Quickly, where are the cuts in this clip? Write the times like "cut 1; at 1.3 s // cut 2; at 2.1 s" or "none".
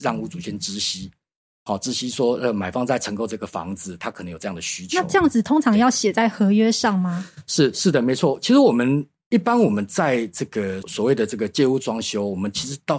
cut 1; at 10.8 s